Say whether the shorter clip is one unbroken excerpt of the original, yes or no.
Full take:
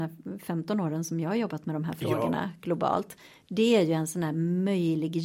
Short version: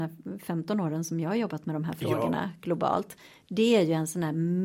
yes